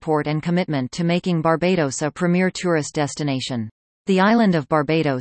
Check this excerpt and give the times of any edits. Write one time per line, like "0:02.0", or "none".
0:03.9